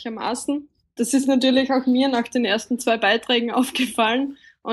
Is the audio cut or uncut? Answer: cut